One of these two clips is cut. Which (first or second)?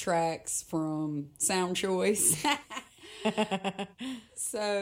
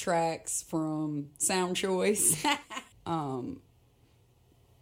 second